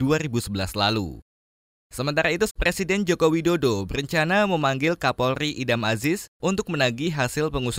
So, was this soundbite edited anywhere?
yes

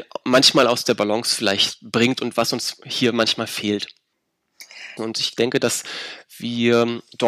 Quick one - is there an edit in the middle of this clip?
yes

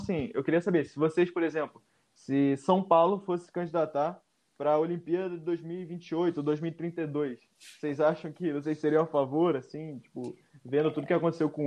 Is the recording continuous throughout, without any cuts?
yes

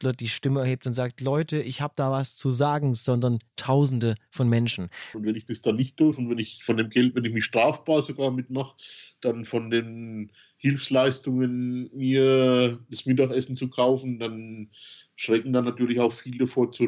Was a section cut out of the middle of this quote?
yes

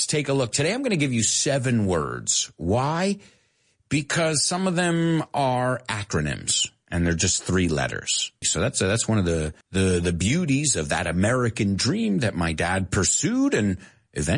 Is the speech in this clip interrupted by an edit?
yes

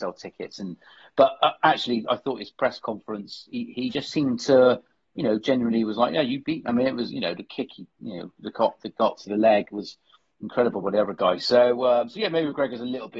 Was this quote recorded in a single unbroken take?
yes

